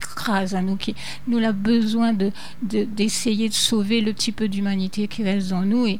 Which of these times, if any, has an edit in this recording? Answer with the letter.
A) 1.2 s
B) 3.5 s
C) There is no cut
C